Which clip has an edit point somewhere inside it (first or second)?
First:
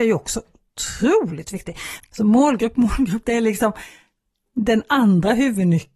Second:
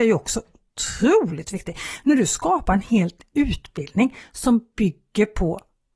first